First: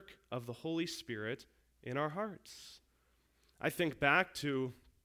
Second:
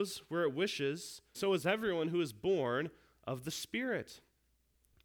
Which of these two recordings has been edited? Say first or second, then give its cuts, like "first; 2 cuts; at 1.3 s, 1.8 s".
second; 1 cut; at 1.3 s